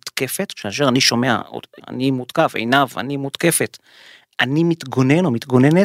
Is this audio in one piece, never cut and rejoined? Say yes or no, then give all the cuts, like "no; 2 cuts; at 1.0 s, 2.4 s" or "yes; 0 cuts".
no; 1 cut; at 1.8 s